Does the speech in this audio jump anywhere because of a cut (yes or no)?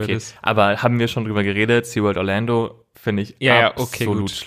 no